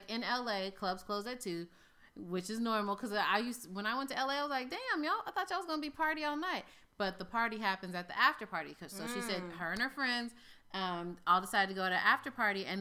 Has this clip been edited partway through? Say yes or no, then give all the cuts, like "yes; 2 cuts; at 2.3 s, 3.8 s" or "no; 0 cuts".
no; 0 cuts